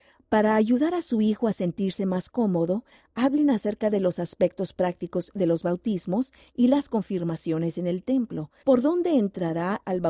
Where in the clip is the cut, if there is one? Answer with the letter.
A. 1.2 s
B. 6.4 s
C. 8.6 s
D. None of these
C